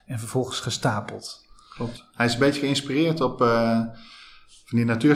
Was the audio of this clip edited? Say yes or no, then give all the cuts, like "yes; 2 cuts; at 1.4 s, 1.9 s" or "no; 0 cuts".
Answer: no; 0 cuts